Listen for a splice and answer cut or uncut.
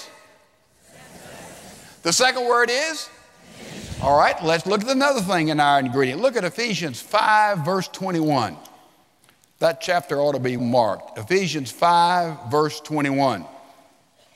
cut